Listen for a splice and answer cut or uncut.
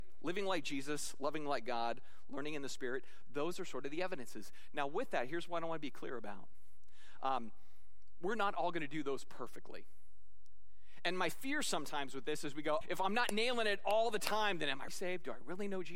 cut